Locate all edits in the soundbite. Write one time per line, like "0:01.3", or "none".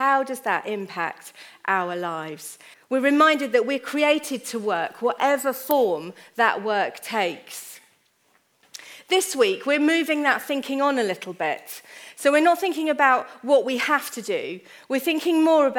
0:02.7